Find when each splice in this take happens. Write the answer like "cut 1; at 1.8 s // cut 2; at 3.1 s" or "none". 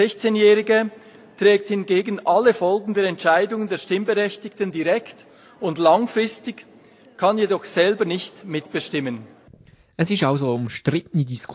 none